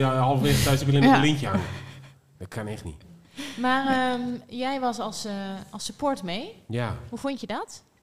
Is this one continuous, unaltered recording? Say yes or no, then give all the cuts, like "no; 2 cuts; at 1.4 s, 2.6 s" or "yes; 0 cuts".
yes; 0 cuts